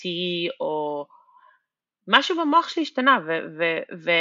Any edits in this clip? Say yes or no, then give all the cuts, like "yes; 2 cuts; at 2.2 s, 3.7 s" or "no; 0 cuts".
no; 0 cuts